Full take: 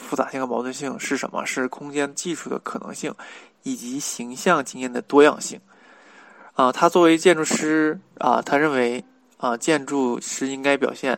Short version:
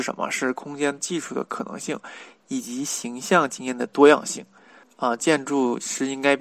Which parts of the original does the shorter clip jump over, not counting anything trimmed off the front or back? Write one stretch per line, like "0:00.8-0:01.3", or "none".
0:06.0-0:09.2